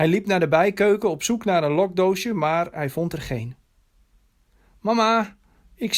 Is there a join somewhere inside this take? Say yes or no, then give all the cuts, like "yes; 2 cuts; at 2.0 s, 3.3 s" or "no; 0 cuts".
no; 0 cuts